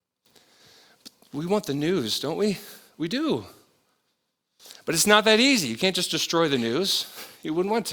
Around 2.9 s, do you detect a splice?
no; 0 cuts

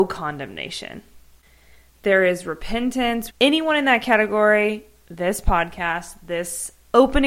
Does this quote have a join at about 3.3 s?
yes; 1 cut; at 3.3 s

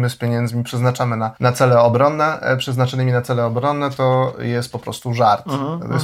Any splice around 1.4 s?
yes; 1 cut; at 1.4 s

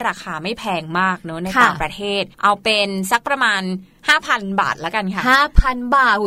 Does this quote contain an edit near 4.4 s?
no; 1 cut; at 2.3 s

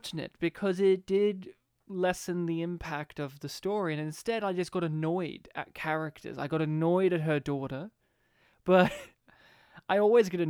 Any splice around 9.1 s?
yes; 1 cut; at 9.1 s

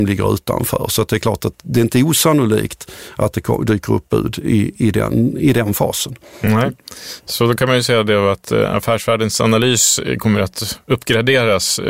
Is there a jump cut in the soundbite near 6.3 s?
no; 1 cut; at 1.5 s

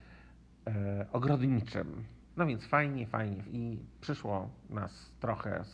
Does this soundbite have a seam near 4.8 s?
no; 2 cuts; at 2.3 s, 3.5 s

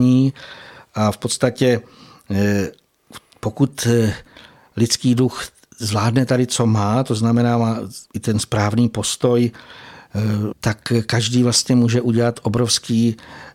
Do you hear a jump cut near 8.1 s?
yes; 2 cuts; at 8.1 s, 10.5 s

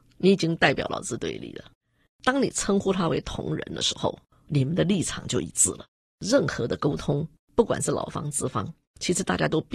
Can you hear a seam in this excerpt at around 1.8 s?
no; 0 cuts

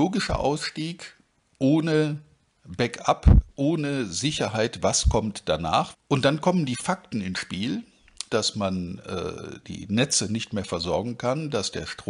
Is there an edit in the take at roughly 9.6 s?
yes; 3 cuts; at 5.9 s, 8.3 s, 9.6 s

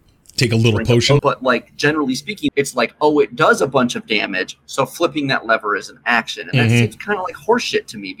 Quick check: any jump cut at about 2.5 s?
yes; 2 cuts; at 1.2 s, 2.5 s

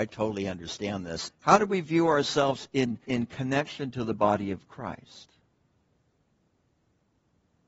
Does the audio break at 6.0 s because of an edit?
no; 2 cuts; at 1.3 s, 3.0 s

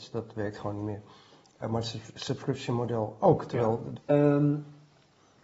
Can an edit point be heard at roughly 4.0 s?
yes; 1 cut; at 4.0 s

